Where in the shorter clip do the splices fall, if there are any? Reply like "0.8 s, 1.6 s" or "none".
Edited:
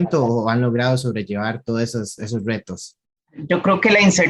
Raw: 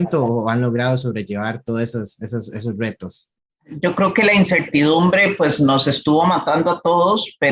2.2 s